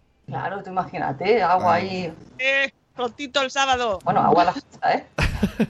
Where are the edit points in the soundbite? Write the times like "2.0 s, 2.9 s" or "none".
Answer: 2.4 s, 4.0 s

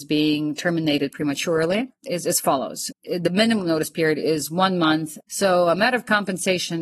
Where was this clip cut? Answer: 2.9 s, 5.2 s

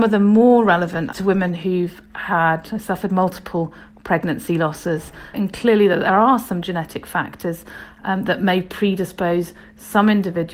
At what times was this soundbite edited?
1.1 s, 5.3 s

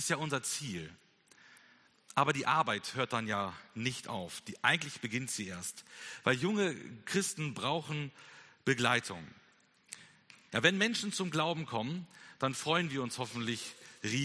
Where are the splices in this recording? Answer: 10.5 s

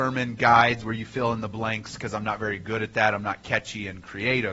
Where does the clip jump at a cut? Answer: none

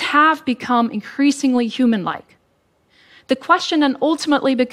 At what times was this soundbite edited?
none

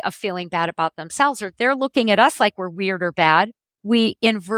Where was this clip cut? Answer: none

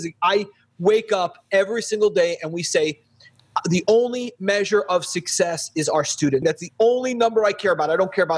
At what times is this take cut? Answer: 6.4 s

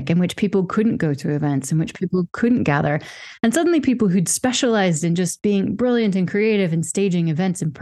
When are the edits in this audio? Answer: none

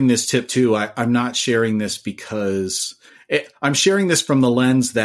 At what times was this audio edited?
none

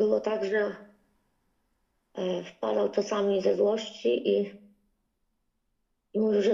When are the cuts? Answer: none

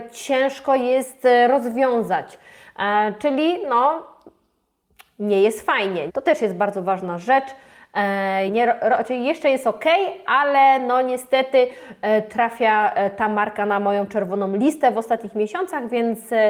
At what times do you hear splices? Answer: 6.1 s, 8.5 s

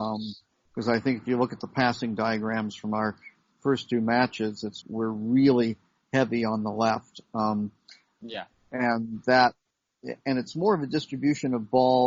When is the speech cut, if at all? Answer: 4.8 s

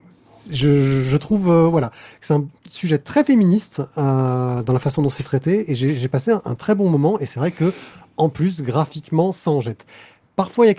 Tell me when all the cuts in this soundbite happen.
none

